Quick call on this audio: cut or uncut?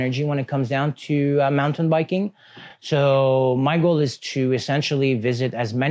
uncut